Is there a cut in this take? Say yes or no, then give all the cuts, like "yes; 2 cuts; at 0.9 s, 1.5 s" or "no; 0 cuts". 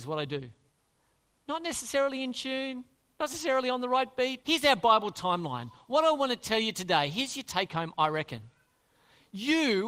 yes; 1 cut; at 4.4 s